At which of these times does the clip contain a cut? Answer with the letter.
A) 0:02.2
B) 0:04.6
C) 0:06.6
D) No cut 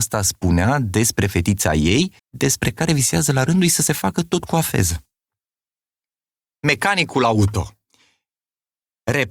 A